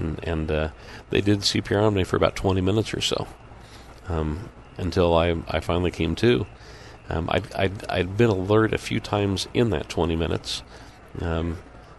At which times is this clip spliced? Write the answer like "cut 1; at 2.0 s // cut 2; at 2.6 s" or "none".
none